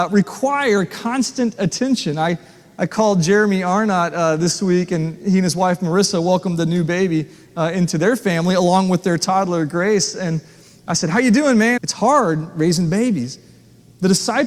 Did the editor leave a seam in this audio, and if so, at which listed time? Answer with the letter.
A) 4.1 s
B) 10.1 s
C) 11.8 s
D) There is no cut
C